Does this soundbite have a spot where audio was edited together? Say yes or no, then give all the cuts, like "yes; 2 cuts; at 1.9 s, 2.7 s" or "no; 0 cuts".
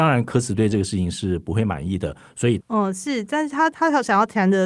yes; 1 cut; at 2.6 s